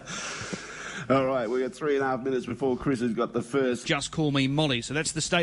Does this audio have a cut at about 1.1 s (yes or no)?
no